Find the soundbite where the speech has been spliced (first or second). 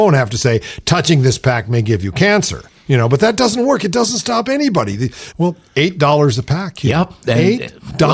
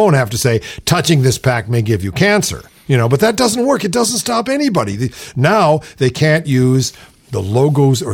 first